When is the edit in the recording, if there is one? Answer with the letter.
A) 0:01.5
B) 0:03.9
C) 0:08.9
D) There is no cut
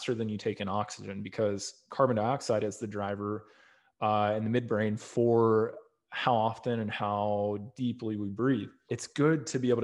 C